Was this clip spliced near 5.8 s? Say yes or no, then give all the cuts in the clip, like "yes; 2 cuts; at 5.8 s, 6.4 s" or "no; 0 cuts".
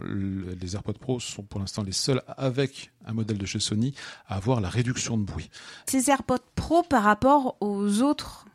yes; 1 cut; at 5.8 s